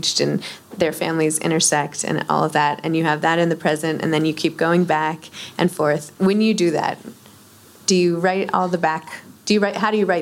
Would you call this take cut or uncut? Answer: uncut